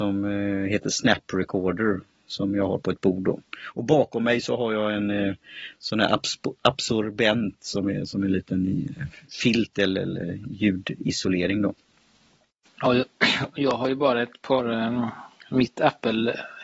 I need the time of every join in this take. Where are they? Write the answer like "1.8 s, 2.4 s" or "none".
none